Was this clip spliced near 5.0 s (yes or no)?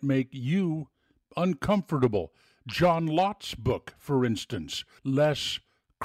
yes